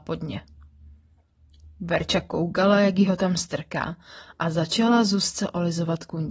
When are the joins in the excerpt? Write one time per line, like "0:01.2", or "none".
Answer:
none